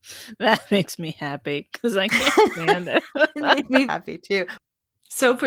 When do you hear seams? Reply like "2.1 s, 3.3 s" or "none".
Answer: 3.9 s